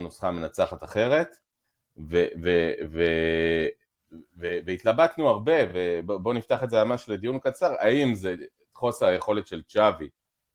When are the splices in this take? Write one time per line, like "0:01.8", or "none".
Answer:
none